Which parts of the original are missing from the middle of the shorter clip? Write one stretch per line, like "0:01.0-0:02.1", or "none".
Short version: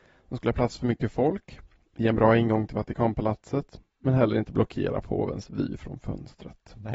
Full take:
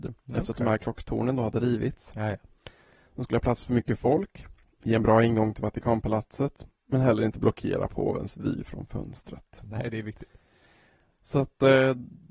none